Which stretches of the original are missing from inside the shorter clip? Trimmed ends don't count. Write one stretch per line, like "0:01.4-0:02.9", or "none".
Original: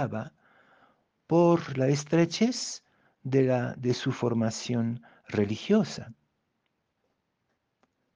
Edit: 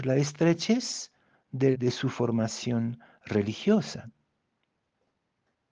0:03.4-0:03.8